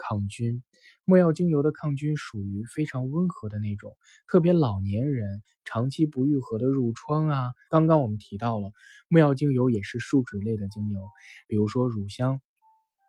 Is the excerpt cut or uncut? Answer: cut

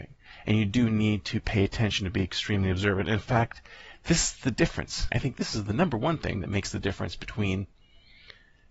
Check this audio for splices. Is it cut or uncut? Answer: cut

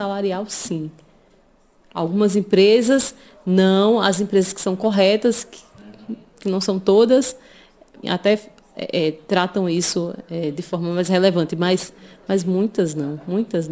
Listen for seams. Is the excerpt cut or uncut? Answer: cut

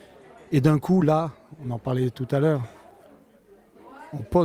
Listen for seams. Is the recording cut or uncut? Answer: uncut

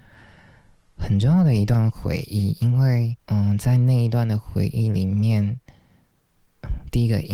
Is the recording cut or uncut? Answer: cut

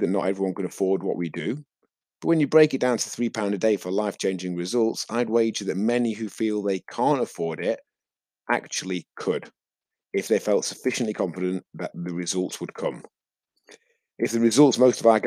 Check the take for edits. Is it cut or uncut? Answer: uncut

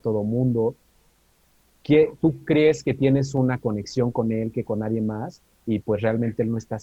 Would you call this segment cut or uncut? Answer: uncut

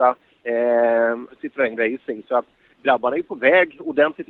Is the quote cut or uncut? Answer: cut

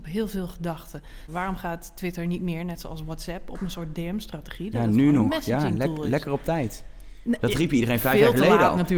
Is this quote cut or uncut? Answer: cut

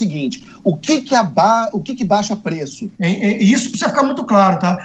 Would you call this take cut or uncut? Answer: cut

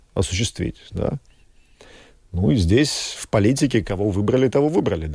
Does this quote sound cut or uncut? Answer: uncut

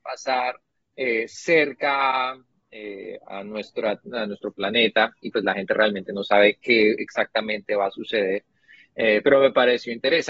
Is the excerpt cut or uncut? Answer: uncut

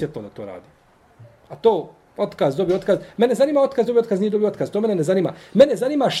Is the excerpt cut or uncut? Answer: uncut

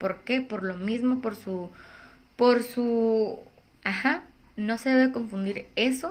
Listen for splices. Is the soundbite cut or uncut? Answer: cut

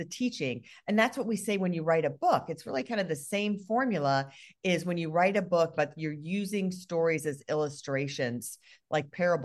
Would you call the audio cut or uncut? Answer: cut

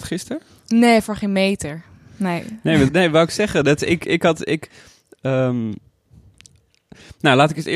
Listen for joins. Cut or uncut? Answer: cut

